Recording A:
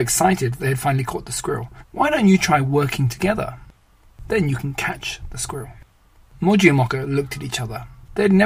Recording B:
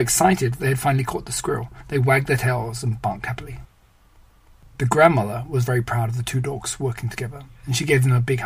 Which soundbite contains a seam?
A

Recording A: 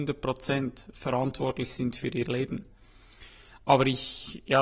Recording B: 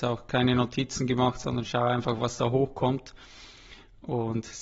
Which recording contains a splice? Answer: A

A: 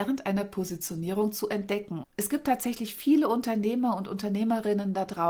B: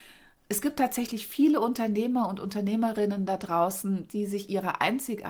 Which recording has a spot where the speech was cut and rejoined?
A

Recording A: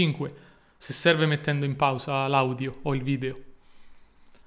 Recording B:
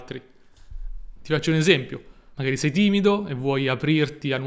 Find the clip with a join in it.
B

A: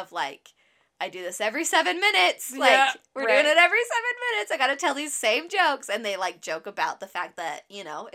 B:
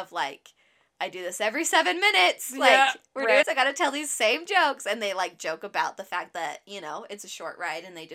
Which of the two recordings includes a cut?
B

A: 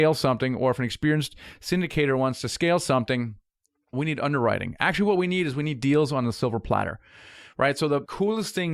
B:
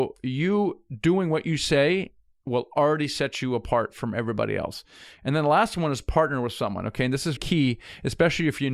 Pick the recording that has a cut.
B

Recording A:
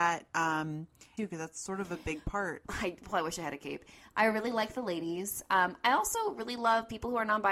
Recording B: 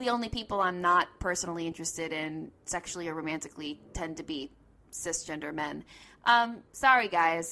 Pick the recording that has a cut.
A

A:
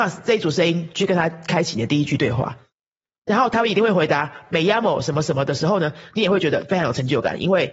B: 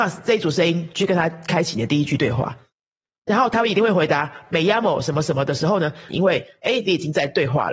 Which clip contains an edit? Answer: B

